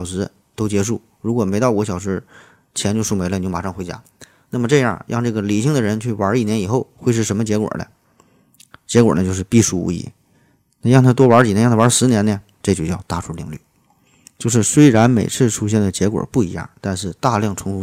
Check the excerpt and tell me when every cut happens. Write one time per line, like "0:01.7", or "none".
0:12.6